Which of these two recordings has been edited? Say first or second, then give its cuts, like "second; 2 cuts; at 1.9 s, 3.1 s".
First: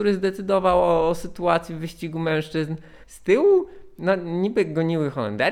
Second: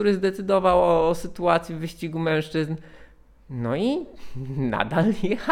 first; 1 cut; at 3.0 s